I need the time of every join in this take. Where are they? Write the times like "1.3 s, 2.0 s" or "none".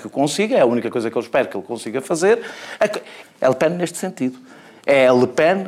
3.2 s